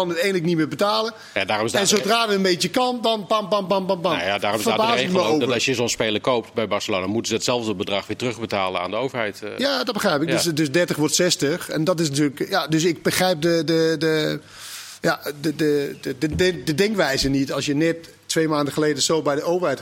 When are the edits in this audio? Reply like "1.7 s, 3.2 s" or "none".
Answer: none